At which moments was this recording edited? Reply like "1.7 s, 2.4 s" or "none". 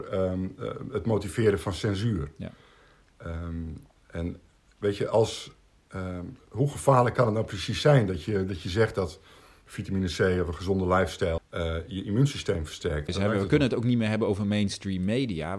11.4 s, 13.1 s